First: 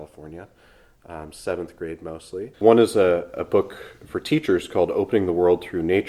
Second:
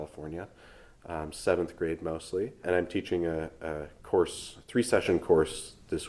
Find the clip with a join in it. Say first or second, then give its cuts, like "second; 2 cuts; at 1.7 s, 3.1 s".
first; 1 cut; at 2.5 s